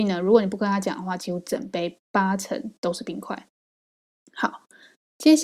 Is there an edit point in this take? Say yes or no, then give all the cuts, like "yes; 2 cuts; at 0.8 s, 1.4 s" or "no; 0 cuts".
no; 0 cuts